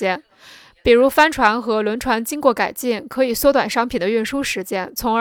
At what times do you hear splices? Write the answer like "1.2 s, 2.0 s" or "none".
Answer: none